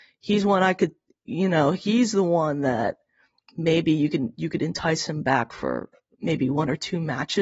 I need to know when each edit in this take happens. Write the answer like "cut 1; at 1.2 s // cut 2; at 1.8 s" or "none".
none